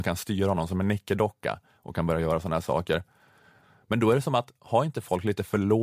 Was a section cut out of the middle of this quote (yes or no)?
no